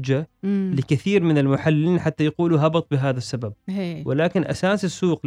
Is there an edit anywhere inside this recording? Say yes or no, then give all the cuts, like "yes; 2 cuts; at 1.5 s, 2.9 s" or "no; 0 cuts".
no; 0 cuts